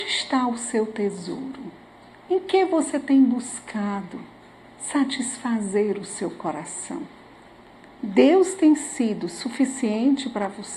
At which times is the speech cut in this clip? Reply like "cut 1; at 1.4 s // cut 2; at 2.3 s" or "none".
none